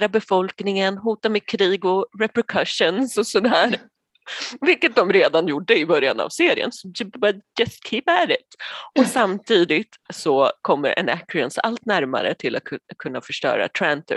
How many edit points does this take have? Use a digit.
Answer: 0